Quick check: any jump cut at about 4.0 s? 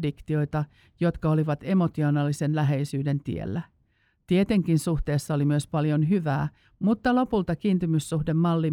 no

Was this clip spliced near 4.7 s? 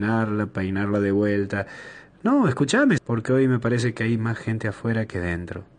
no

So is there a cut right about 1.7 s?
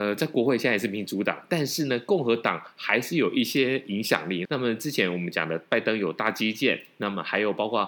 no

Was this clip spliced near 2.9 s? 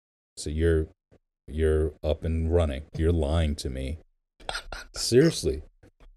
yes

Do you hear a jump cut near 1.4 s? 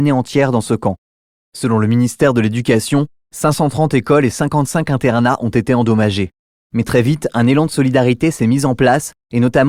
yes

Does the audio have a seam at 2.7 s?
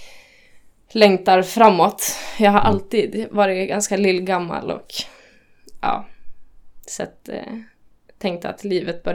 no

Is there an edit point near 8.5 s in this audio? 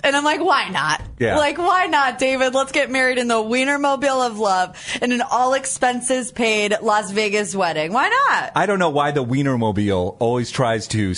no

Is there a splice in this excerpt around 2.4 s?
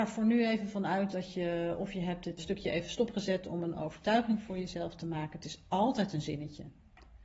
yes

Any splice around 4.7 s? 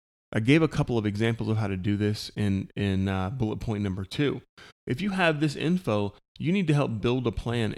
yes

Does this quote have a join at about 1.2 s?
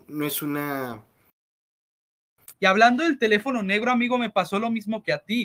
no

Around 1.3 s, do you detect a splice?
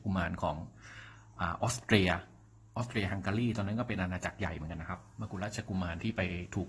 no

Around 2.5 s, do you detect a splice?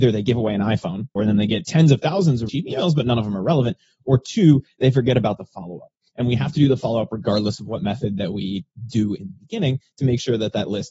yes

